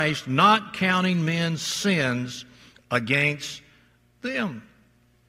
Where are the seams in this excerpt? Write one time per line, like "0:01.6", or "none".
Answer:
none